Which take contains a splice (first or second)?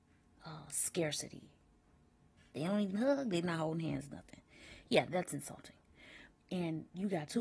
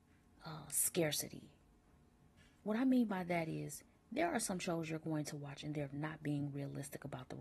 first